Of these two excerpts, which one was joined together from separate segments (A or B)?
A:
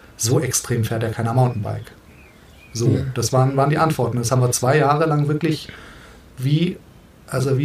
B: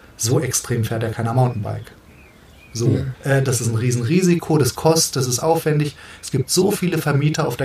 B